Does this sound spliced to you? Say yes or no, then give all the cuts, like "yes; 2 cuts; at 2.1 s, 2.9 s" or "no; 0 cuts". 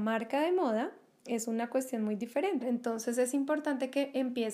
yes; 1 cut; at 2.6 s